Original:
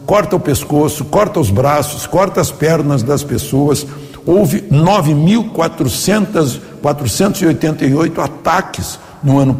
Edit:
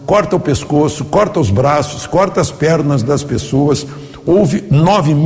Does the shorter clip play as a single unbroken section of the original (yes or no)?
yes